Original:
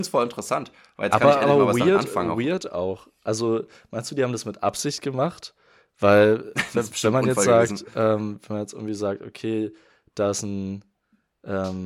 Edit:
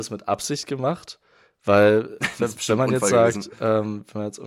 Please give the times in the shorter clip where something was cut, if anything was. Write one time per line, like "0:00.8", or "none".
none